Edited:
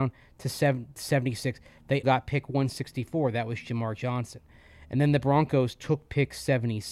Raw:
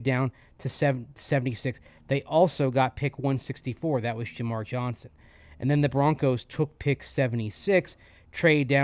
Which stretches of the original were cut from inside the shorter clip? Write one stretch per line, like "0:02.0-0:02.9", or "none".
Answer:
0:02.2-0:02.7